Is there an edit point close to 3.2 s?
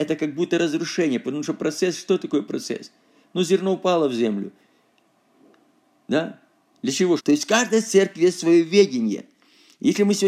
no; 1 cut; at 7.2 s

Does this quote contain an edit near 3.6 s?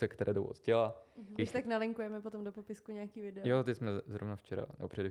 no; 1 cut; at 1.4 s

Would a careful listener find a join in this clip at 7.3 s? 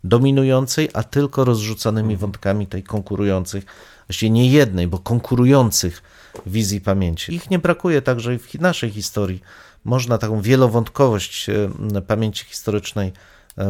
yes; 1 cut; at 7.3 s

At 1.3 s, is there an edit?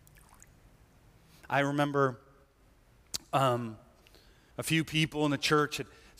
no; 1 cut; at 4.5 s

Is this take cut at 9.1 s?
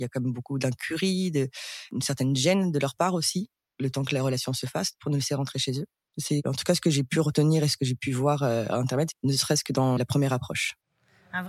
yes; 2 cuts; at 6.1 s, 9.1 s

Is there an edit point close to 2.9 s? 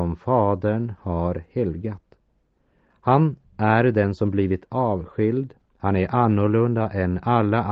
no; 0 cuts

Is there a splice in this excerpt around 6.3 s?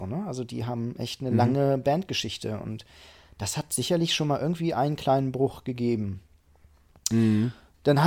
no; 0 cuts

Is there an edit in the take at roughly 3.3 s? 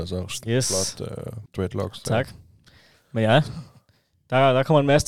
no; 1 cut; at 1.5 s

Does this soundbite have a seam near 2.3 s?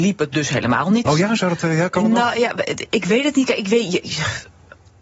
no; 1 cut; at 1.1 s

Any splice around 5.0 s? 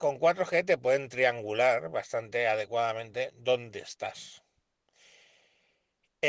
no; 0 cuts

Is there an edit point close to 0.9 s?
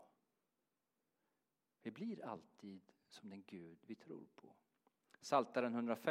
no; 0 cuts

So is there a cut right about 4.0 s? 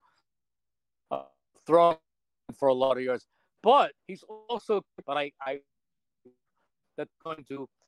yes; 1 cut; at 4.0 s

